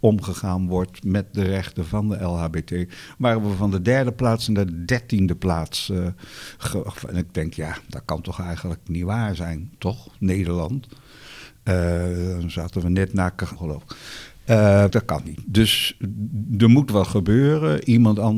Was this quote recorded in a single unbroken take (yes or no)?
no